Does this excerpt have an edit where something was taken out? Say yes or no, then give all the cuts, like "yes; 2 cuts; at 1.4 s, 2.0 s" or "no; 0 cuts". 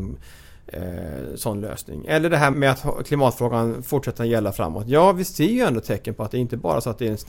yes; 1 cut; at 2.5 s